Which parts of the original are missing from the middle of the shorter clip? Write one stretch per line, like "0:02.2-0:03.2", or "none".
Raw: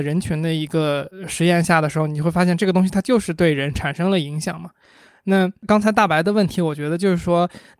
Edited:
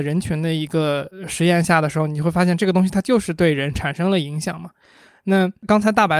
none